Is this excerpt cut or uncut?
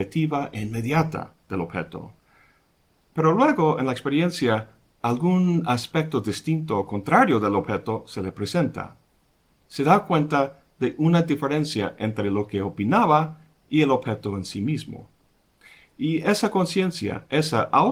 uncut